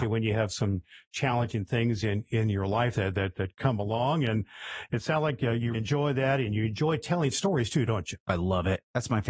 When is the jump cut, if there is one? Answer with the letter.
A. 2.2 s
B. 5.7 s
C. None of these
B